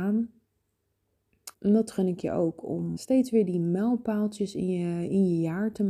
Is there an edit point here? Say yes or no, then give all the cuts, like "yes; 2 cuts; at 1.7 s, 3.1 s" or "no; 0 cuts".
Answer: yes; 2 cuts; at 1.5 s, 3.0 s